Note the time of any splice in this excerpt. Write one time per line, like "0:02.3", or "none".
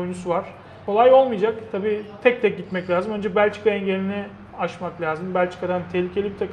none